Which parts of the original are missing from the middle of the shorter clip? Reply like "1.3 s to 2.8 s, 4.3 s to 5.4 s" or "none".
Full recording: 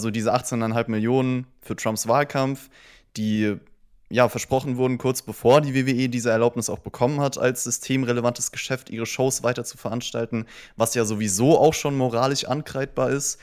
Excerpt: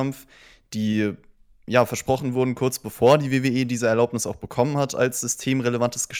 none